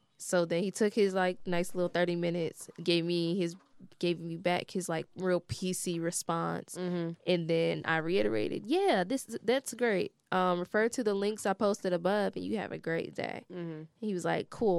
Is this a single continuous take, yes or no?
yes